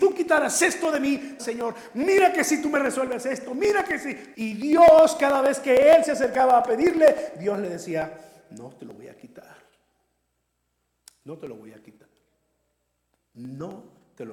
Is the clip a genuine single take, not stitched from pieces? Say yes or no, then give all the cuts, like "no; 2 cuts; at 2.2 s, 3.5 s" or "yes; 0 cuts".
no; 2 cuts; at 1.4 s, 4.3 s